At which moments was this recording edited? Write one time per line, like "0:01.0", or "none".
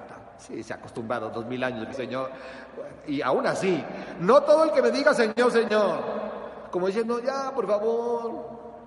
0:01.9